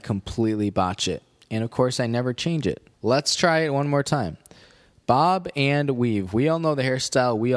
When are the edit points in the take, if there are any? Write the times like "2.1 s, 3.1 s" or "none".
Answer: 2.9 s